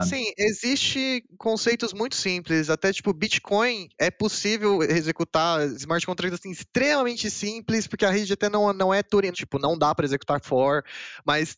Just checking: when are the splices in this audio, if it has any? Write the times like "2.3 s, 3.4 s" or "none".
9.3 s